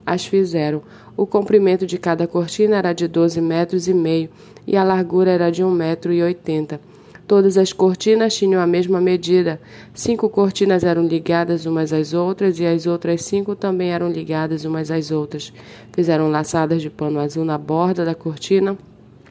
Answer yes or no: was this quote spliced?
no